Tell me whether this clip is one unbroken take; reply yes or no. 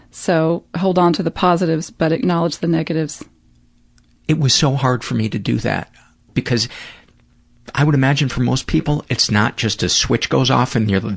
no